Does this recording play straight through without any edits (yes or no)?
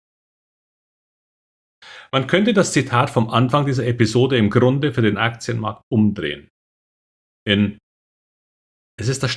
yes